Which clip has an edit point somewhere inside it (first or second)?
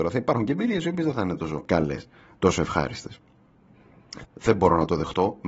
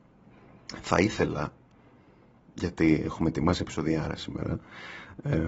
first